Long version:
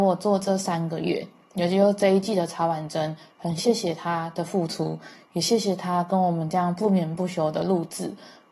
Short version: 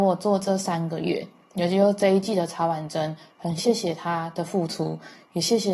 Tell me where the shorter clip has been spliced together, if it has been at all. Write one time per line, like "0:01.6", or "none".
none